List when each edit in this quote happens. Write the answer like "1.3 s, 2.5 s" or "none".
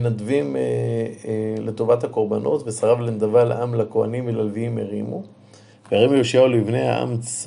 5.7 s